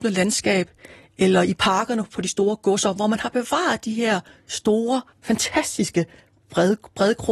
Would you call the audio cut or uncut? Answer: cut